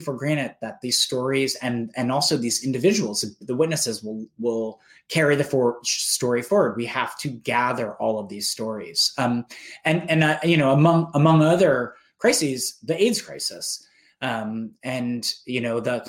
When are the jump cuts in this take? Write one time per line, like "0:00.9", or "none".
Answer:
none